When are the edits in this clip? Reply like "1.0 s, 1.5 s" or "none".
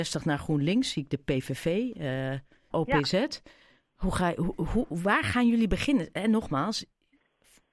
2.7 s